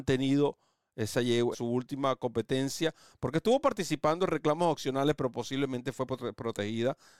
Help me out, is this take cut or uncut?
cut